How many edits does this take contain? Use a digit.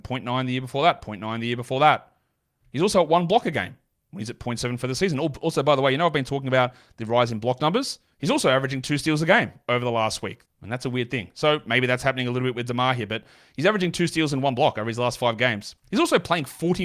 2